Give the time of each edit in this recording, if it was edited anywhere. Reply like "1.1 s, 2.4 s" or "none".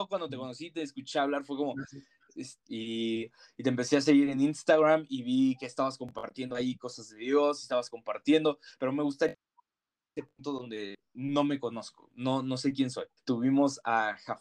2.6 s, 13.2 s